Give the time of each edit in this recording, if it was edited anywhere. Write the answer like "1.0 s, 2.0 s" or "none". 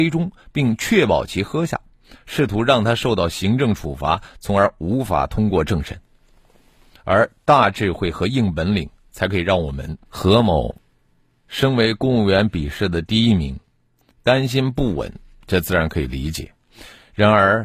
7.0 s, 10.0 s